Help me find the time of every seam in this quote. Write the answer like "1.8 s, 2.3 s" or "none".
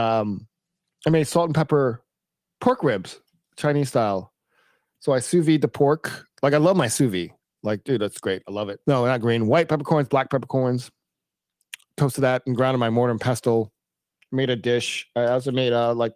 8.8 s